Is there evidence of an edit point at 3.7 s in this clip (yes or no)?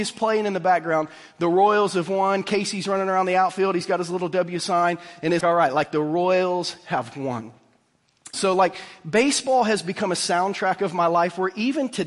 no